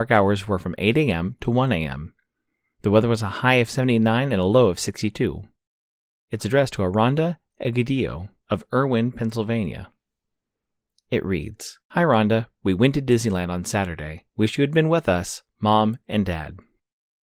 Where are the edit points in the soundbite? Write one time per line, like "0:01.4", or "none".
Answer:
0:11.8
0:14.3